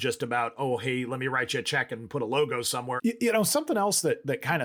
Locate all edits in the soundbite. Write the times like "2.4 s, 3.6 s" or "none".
3.0 s